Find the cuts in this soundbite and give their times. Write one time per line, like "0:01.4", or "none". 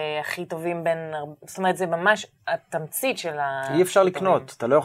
none